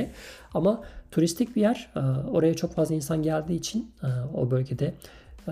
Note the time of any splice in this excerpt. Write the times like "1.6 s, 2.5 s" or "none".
none